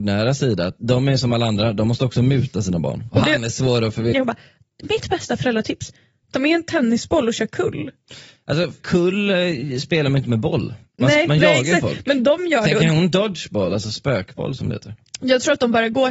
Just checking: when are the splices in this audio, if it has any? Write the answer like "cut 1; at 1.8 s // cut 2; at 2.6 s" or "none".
cut 1; at 3.1 s // cut 2; at 4.1 s

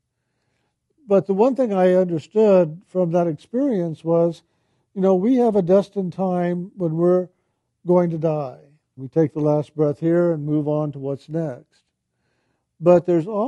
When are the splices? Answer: cut 1; at 9.0 s

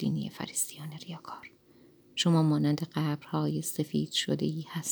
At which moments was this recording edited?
none

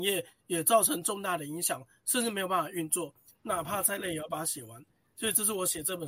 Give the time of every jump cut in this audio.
cut 1; at 3.3 s

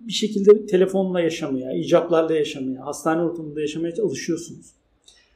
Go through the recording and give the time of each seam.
none

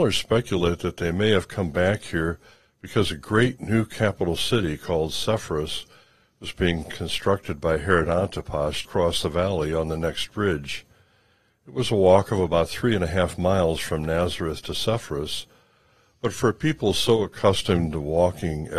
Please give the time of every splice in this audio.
cut 1; at 8.8 s

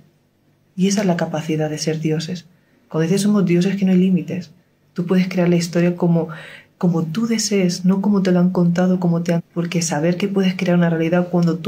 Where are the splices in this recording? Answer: cut 1; at 9.4 s

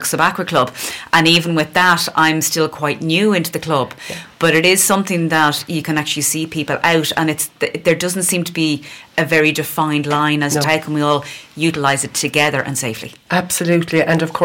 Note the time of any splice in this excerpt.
cut 1; at 10.6 s

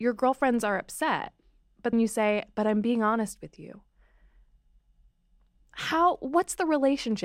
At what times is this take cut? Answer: cut 1; at 1.9 s

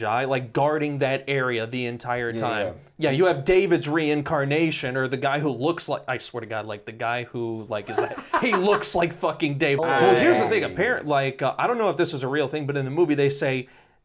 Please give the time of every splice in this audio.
cut 1; at 9.8 s

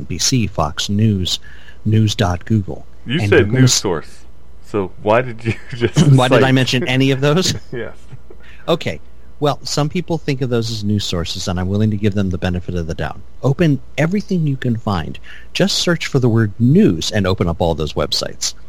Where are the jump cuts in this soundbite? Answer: cut 1; at 13.4 s

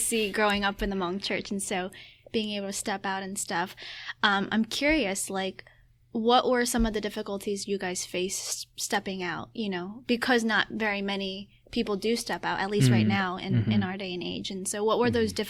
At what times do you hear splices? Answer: none

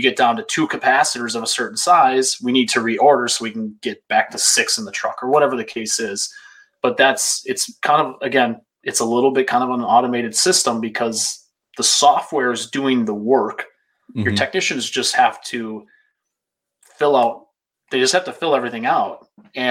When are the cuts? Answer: none

